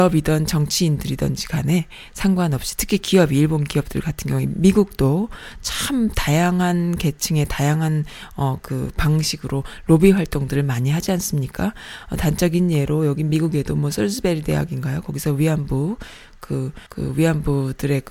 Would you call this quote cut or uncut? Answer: cut